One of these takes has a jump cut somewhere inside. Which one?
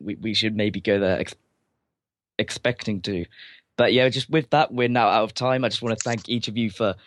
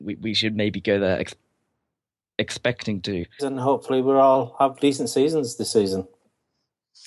second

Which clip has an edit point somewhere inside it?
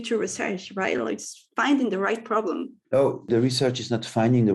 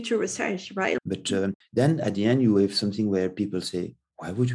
second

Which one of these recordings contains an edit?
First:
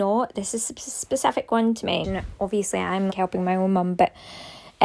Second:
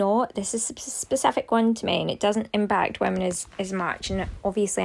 first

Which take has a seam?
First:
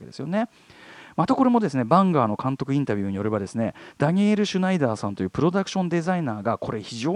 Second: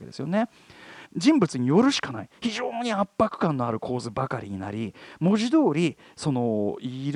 second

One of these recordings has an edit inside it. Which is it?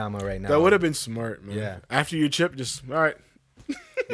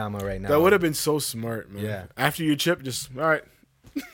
first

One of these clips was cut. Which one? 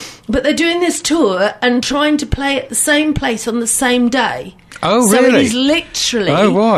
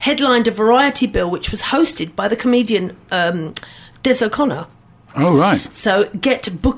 second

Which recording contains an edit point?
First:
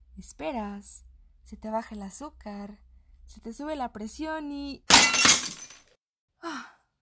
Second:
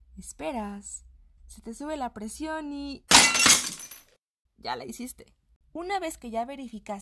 second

